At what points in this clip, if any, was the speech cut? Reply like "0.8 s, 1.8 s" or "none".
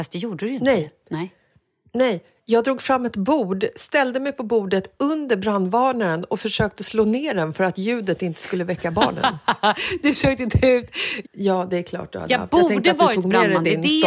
11.2 s